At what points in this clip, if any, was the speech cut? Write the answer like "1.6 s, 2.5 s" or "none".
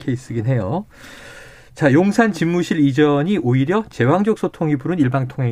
none